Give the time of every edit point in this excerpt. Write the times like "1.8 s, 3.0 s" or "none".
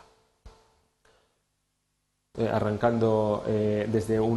2.3 s